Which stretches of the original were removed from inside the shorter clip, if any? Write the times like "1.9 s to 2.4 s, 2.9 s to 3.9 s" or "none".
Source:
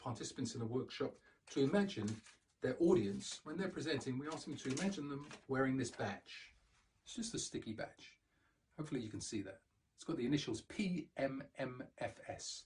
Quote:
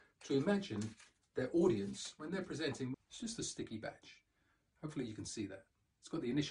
4.2 s to 6.9 s